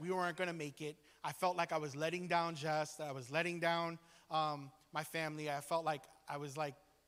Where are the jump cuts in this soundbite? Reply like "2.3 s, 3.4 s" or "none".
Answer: none